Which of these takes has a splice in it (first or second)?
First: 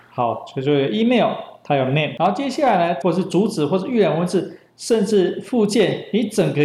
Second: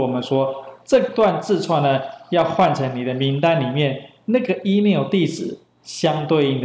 first